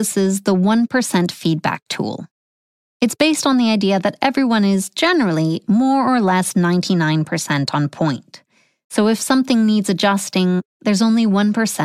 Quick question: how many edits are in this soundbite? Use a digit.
0